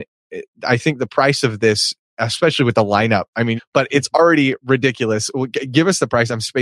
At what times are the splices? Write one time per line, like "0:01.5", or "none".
0:03.6

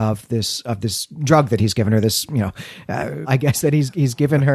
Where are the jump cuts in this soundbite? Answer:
0:03.2

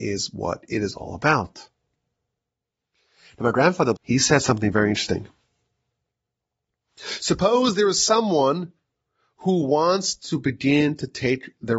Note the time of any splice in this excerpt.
0:04.0

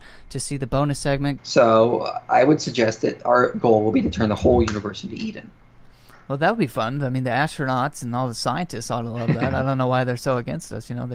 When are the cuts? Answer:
0:01.4

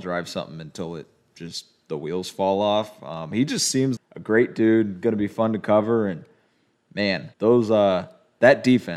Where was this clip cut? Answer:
0:04.0
0:07.3

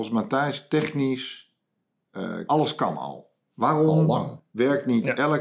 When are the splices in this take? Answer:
0:02.5

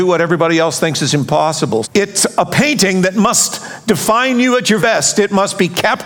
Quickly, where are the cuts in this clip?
0:01.8
0:04.8

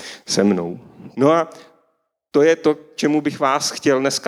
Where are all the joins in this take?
0:01.1

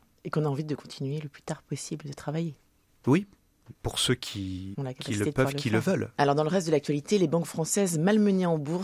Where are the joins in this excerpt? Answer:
0:04.7
0:06.1

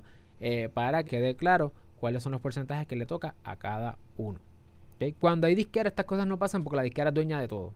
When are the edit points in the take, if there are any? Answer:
0:01.0

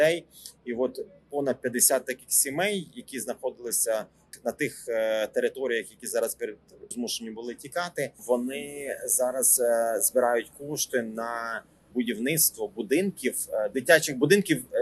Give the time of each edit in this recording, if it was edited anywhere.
0:06.9
0:08.2

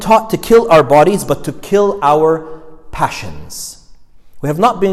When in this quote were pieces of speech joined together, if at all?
none

